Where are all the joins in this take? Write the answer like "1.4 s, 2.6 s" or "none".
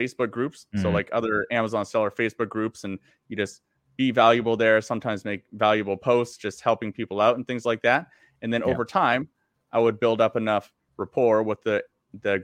none